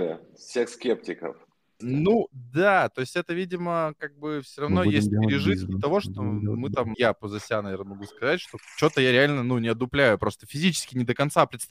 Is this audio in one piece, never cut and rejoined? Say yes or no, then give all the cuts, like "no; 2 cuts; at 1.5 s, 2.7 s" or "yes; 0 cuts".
no; 2 cuts; at 1.8 s, 6.9 s